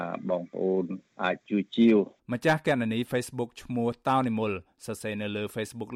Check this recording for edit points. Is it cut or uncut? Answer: cut